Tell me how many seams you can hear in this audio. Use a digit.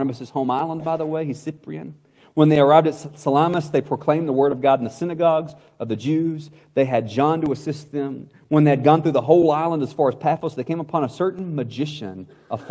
0